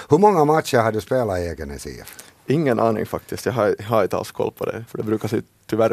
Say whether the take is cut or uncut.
cut